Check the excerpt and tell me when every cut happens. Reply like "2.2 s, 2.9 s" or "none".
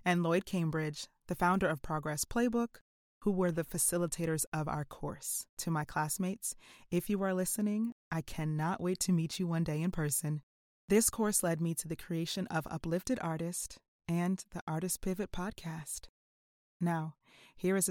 5.5 s